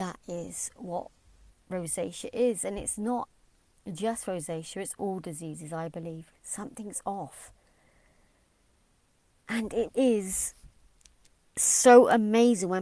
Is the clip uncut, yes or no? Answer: no